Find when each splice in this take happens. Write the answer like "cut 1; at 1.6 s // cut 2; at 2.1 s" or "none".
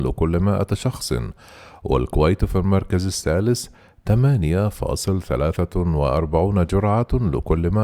none